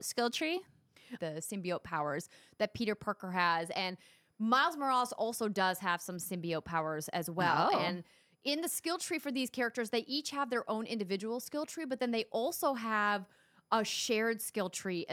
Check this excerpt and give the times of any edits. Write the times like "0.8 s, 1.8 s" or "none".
1.2 s